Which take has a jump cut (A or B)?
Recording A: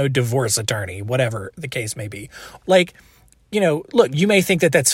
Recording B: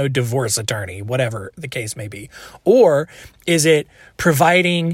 A